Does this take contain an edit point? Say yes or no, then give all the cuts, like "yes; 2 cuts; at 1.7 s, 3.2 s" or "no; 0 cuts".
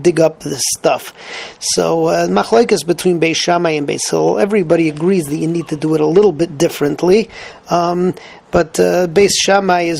no; 0 cuts